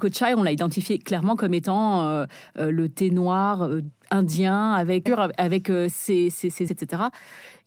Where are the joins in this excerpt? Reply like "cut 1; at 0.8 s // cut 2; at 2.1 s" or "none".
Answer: cut 1; at 5.1 s // cut 2; at 6.7 s